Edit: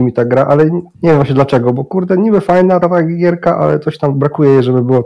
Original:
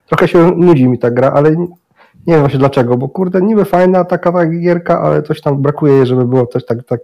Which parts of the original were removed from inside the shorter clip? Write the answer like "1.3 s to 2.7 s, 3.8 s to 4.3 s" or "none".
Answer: 1.8 s to 2.2 s, 4.1 s to 4.2 s

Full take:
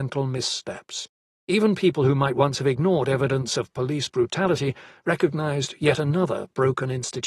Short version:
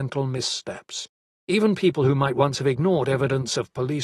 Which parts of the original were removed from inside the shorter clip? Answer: none

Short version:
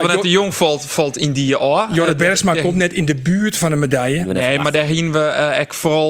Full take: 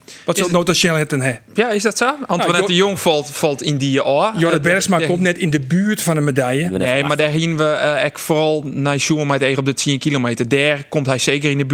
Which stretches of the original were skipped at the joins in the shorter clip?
none

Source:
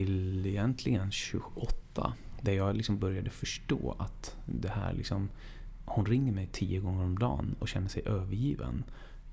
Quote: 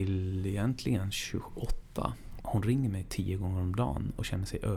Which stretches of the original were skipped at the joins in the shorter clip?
2.4 s to 5.8 s

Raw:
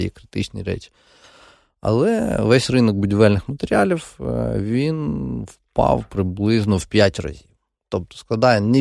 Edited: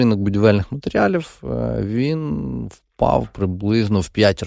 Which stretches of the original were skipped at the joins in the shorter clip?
none

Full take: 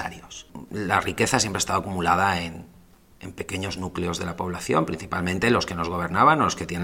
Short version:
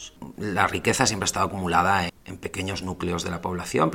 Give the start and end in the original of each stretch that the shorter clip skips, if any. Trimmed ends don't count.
2.4 s to 3.0 s

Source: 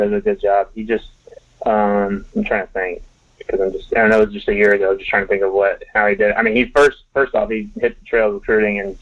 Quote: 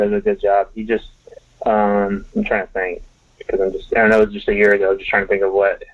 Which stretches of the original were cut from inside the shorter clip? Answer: none

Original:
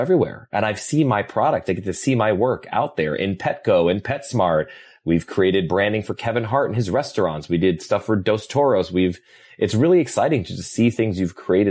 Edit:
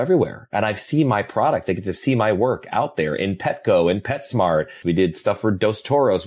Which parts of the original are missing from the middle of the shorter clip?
4.8 s to 7.5 s

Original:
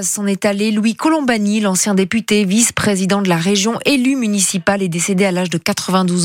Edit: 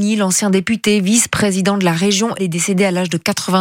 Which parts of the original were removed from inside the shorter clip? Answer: 3.8 s to 4.8 s

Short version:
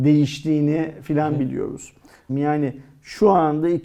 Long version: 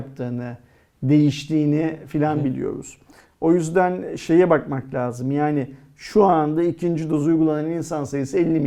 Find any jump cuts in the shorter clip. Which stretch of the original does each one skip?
3.3 s to 5.2 s

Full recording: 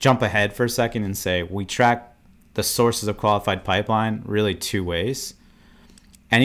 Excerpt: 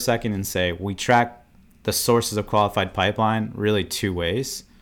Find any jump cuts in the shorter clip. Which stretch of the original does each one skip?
none

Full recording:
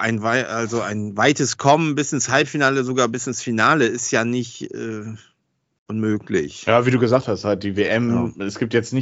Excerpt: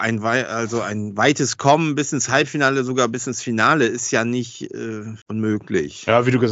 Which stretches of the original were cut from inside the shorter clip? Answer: 5.2 s to 5.8 s

